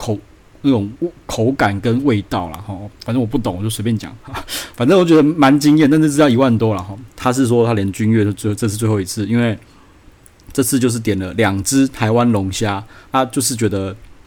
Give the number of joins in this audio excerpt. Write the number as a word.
two